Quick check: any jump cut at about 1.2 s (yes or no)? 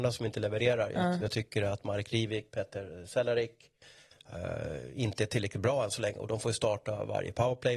no